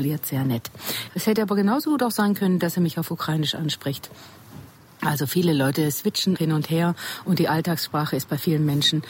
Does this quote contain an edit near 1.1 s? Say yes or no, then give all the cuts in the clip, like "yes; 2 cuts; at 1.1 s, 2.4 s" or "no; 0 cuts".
yes; 2 cuts; at 1.1 s, 6.4 s